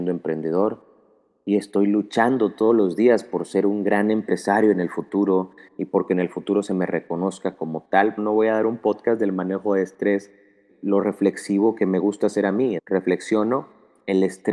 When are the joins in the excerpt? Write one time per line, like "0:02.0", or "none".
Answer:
0:08.2
0:10.7
0:12.8

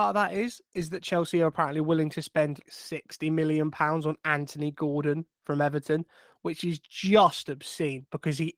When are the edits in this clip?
0:02.6

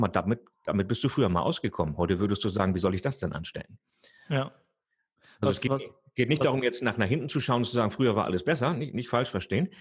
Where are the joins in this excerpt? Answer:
none

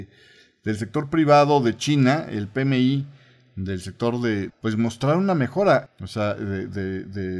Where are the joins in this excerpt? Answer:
0:04.5
0:05.9

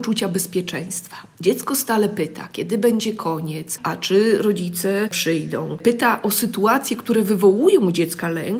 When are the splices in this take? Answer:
none

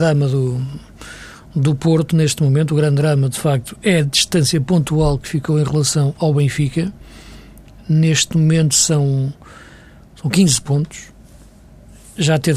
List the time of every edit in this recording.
none

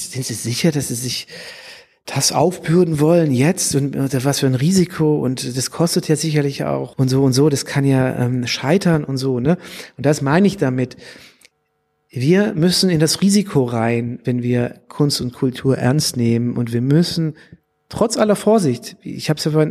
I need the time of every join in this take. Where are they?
0:06.9

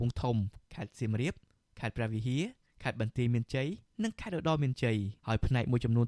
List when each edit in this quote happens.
0:05.2

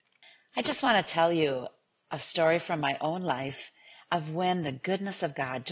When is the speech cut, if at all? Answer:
none

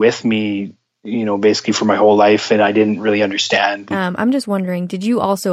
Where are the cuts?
0:03.9

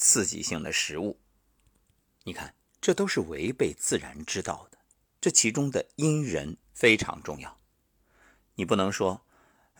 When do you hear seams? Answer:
0:05.1
0:06.6

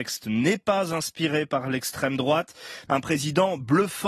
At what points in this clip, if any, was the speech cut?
0:02.9

